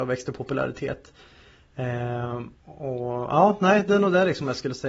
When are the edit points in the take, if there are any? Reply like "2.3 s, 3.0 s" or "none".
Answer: 2.6 s

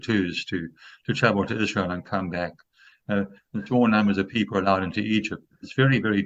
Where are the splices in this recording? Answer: none

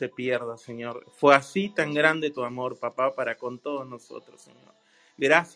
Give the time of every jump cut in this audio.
none

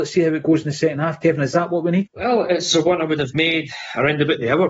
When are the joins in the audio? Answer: 2.1 s

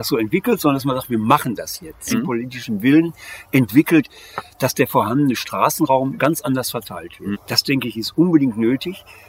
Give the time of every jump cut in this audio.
2.1 s, 7.3 s

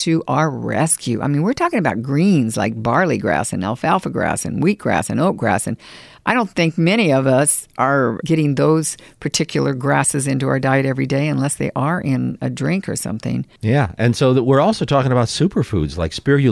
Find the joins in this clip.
none

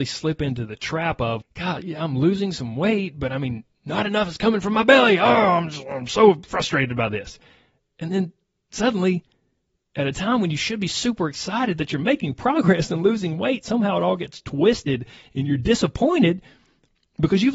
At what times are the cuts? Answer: 1.4 s

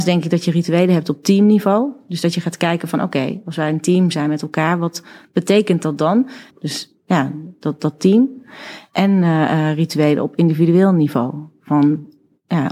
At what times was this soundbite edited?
6.5 s

